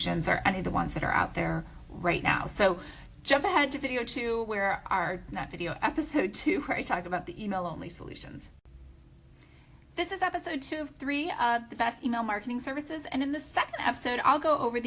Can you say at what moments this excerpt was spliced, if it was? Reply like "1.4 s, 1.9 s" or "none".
none